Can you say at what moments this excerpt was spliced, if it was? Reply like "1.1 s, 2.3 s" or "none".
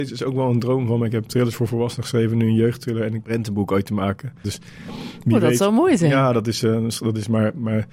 3.2 s, 4.4 s